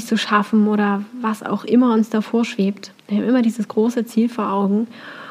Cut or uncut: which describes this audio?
uncut